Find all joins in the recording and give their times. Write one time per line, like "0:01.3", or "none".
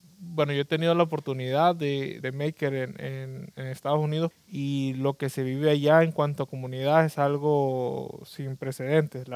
0:02.2
0:04.3

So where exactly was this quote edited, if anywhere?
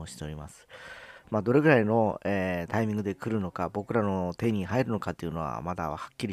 0:01.2

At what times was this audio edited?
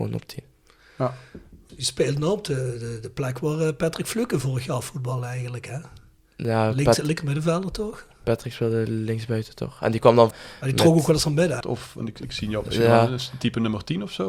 0:01.7
0:10.3
0:11.6

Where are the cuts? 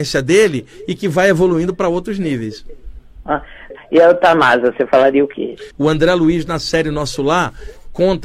0:03.7
0:05.7

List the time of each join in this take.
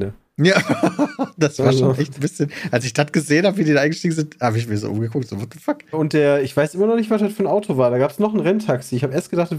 0:05.9

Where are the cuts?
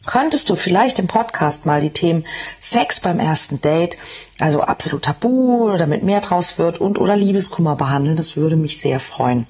none

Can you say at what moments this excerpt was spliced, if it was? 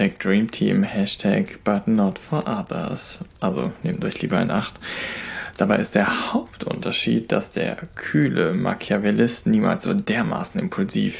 none

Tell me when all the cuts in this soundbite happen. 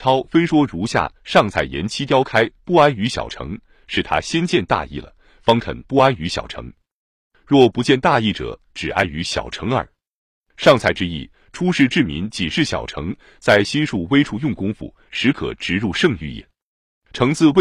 none

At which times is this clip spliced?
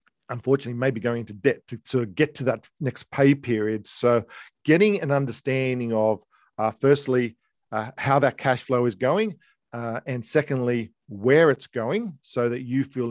none

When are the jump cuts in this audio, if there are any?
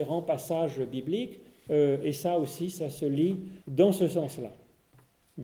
0:01.7
0:03.6

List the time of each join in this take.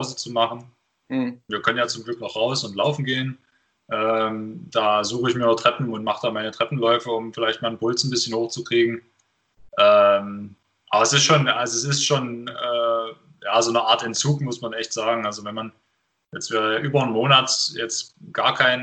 0:01.5

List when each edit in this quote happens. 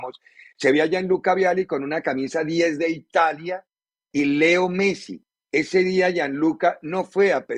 0:05.4

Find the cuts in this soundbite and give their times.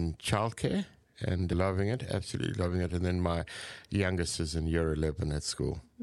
none

